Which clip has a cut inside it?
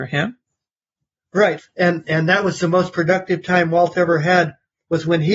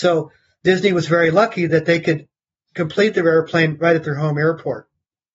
first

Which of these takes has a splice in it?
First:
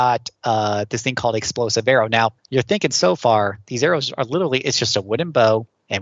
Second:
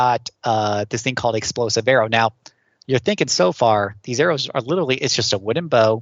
first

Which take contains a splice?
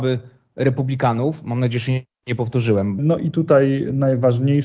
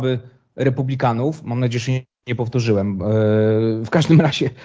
first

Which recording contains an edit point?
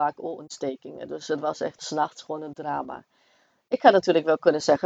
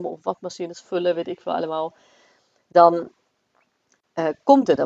first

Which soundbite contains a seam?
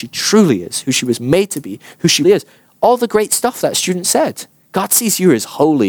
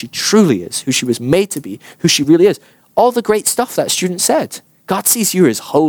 first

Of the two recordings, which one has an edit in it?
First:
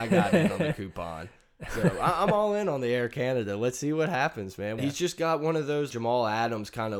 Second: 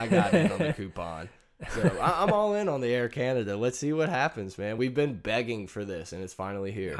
first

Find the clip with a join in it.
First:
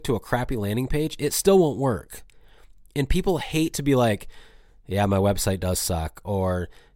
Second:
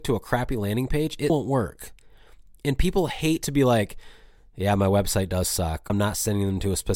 second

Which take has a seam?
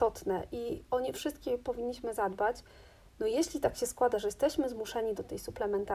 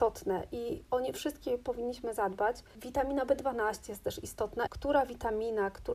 second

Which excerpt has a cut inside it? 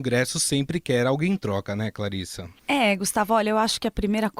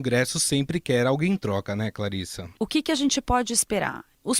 second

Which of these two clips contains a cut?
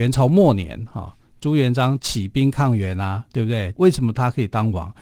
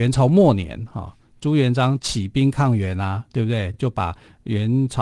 first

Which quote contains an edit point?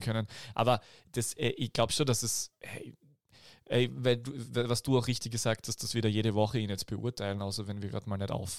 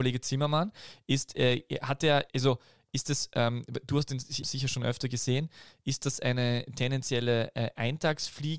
second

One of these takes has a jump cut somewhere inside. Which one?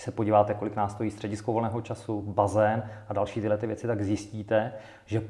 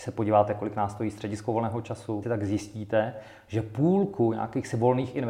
second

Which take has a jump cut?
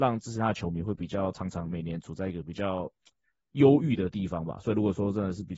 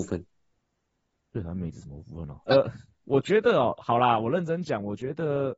second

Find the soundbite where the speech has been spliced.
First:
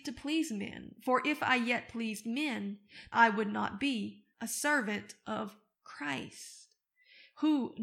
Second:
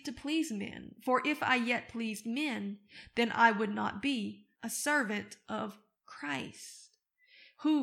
first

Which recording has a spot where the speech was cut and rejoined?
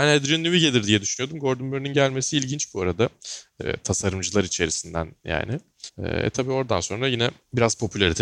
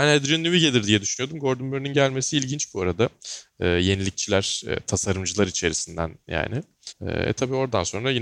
first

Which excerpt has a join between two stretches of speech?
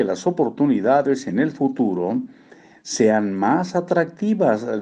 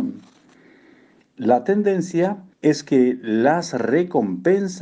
second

